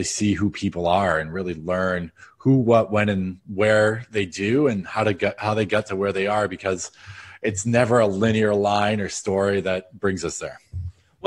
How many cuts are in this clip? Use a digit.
0